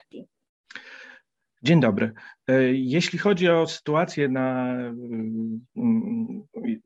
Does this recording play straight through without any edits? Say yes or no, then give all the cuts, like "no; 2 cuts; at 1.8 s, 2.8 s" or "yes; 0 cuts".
yes; 0 cuts